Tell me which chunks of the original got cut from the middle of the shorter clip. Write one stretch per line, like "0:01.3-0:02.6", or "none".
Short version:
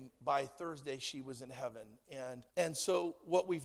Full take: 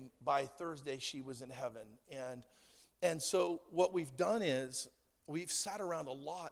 0:02.5-0:02.9